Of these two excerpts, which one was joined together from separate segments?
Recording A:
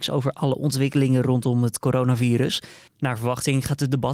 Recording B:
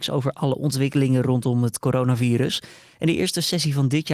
A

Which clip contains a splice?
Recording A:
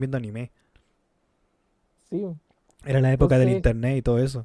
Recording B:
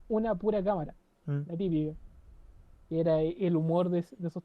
B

